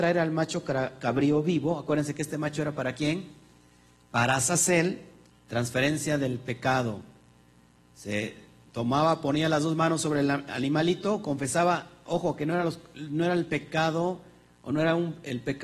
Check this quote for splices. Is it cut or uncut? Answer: cut